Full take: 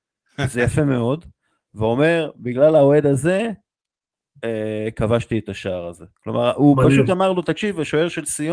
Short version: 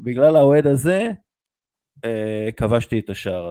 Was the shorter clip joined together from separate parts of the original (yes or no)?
no